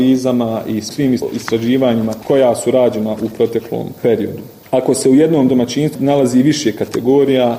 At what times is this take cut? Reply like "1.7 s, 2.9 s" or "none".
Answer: none

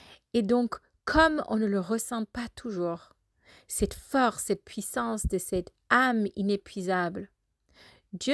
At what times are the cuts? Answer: none

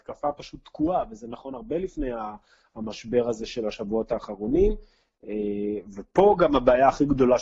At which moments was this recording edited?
none

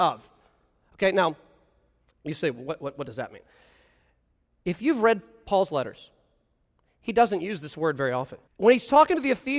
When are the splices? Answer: 8.5 s

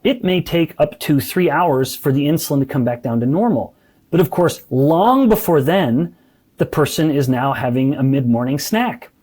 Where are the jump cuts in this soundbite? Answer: 4.1 s

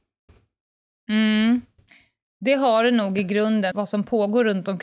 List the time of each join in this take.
3.7 s

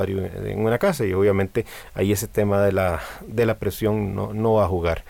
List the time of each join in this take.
none

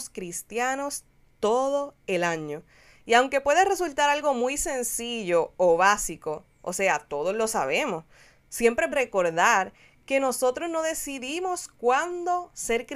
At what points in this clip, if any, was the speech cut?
8.9 s

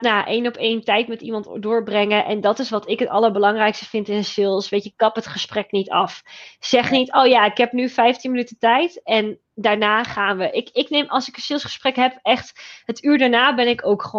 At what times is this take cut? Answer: none

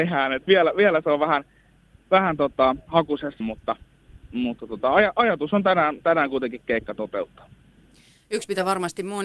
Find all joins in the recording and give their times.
3.4 s

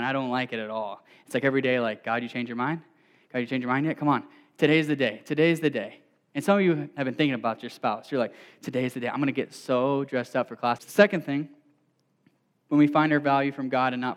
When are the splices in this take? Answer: 10.8 s

